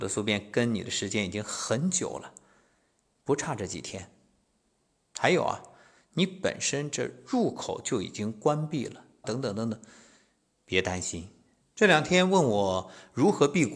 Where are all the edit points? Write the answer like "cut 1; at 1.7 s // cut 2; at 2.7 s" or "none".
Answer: cut 1; at 9.2 s // cut 2; at 11.6 s